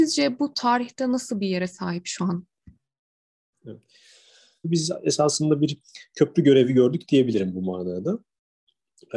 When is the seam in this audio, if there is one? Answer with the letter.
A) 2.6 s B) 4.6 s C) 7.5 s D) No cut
B